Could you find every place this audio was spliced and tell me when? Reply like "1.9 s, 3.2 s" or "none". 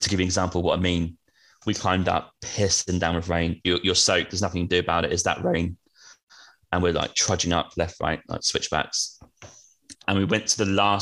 3.6 s

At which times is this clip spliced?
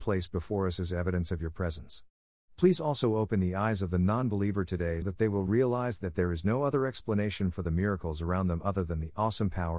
5.0 s

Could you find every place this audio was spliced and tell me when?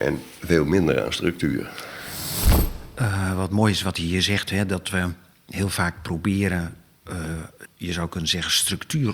7.6 s

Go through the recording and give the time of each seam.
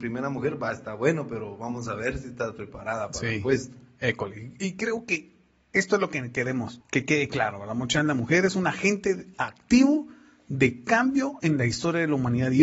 none

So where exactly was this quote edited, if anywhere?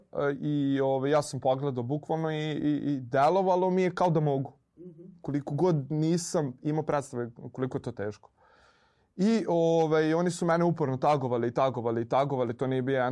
none

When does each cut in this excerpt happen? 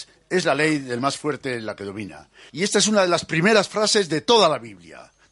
2.5 s

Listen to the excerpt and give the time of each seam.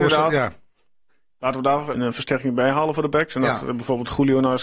1.9 s

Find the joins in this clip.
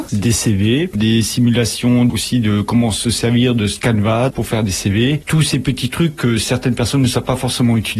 0.9 s, 5.2 s

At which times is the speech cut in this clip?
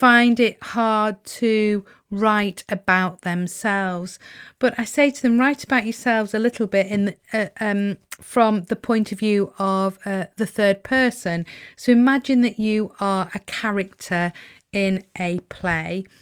none

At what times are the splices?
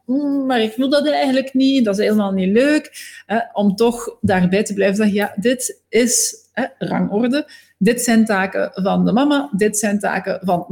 none

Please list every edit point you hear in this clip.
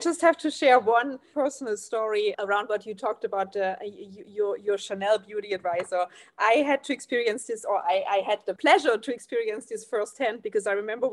none

